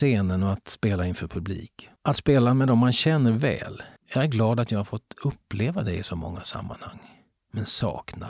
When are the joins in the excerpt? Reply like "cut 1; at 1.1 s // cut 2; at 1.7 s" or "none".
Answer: cut 1; at 2.0 s // cut 2; at 4.0 s